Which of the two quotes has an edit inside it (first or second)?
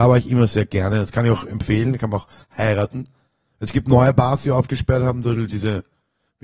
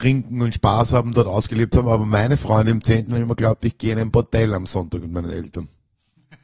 first